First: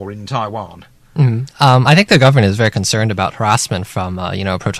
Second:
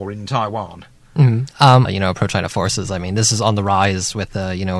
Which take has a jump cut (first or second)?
second